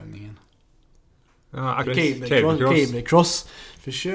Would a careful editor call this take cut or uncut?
cut